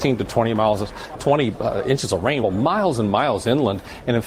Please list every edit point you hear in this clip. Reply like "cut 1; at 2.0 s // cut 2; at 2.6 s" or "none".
cut 1; at 1.1 s // cut 2; at 2.4 s